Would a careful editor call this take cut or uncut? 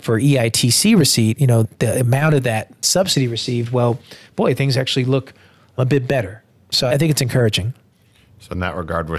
uncut